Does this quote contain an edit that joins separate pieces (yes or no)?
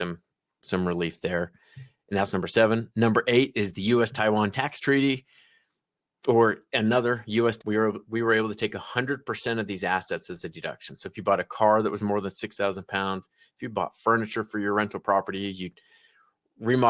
yes